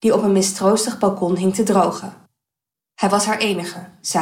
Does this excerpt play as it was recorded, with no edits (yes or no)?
yes